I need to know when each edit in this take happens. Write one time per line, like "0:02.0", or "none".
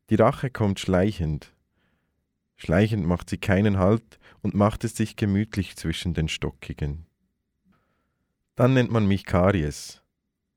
none